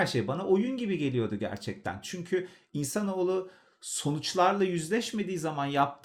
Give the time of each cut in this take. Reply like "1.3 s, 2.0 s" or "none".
none